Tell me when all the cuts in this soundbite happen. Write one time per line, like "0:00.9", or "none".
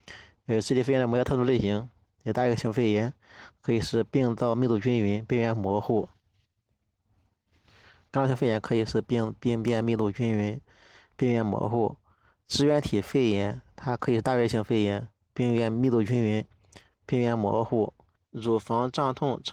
0:08.1
0:18.1